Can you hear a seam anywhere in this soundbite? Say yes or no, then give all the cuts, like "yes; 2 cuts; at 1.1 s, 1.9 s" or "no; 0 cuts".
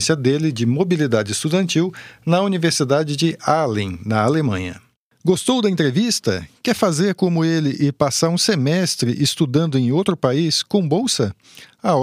no; 0 cuts